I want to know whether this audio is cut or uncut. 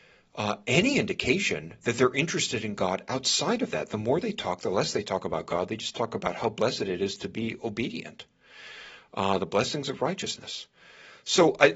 uncut